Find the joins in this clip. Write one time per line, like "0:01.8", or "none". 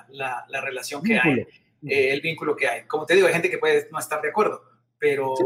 none

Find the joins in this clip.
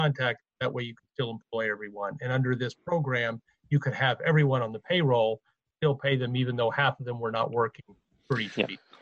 none

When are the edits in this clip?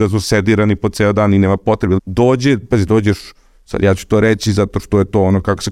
0:02.0

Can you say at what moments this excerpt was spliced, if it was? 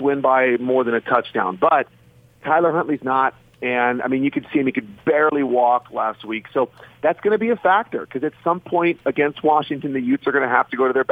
none

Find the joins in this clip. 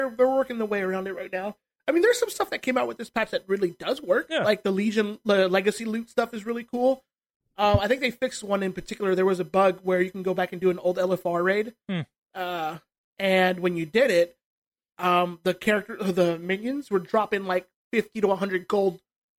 none

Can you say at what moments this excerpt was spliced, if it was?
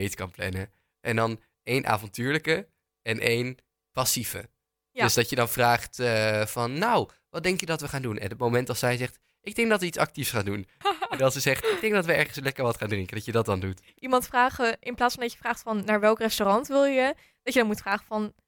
0:10.8
0:14.0

